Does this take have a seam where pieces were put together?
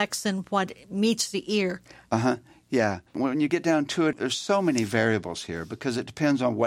yes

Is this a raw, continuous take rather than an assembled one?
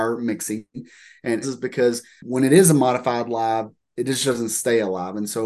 no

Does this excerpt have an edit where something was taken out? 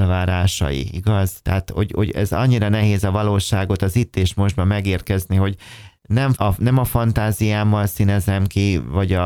yes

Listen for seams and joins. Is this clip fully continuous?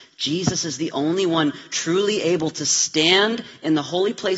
yes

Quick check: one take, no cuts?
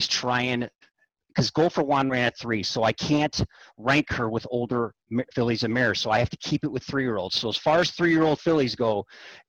yes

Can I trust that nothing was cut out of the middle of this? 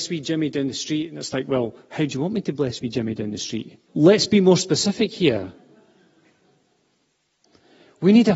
no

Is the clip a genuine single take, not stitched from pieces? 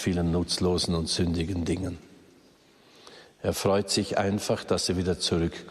yes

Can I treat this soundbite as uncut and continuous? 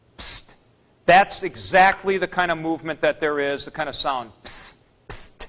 yes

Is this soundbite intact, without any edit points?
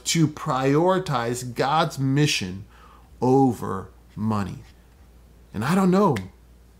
yes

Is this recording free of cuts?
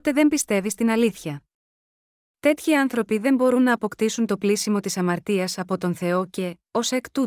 no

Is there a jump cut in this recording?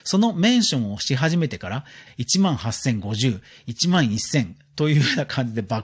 yes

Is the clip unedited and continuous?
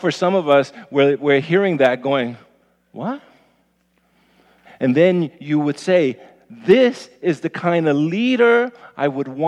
no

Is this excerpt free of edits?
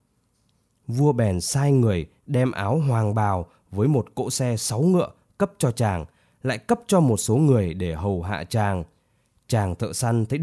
yes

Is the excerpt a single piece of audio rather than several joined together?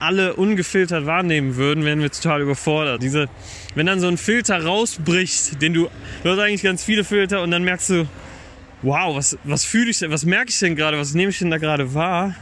no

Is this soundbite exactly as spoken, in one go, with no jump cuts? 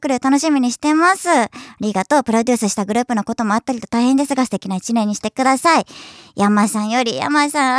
yes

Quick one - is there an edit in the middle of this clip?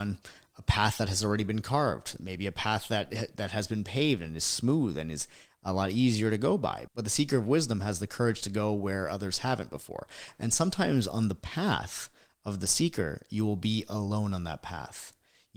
no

